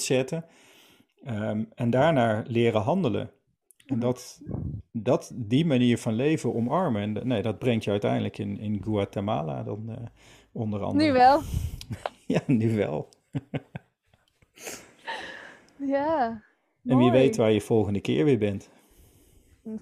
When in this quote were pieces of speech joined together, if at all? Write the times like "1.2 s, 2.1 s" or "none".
none

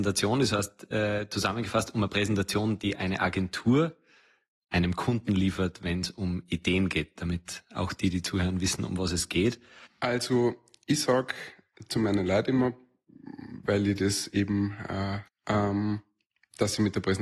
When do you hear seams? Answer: 9.9 s, 15.3 s

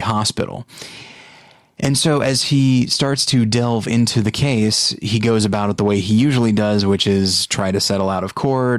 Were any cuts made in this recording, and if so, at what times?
none

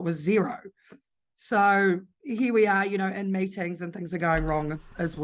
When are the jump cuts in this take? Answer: none

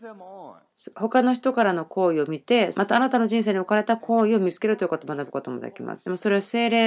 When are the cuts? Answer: 2.7 s

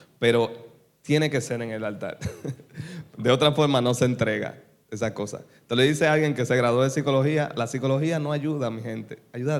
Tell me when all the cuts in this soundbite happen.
none

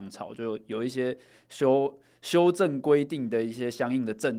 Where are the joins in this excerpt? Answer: none

